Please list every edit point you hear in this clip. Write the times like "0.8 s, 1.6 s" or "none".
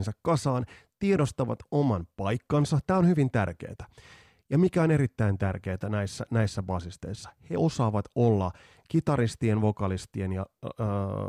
none